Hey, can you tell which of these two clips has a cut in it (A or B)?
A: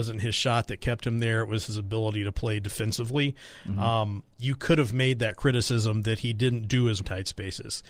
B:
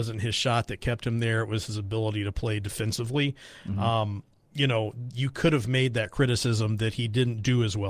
A